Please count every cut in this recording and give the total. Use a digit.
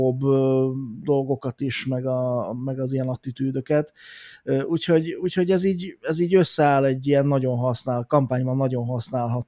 0